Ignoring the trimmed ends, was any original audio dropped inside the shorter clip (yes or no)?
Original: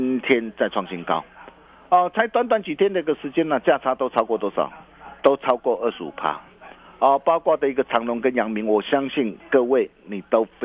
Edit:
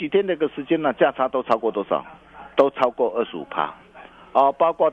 no